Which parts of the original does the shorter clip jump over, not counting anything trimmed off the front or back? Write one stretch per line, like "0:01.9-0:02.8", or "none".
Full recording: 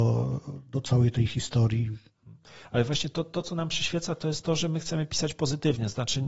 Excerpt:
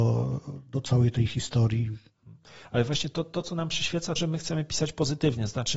0:04.2-0:04.6